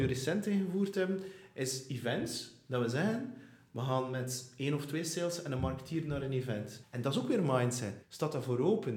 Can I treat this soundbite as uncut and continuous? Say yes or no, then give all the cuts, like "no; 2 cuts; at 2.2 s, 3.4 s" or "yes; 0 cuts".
no; 2 cuts; at 6.8 s, 8.0 s